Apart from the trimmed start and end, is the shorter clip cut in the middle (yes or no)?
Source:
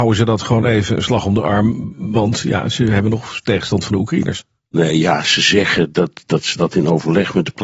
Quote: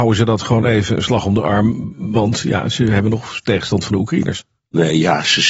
no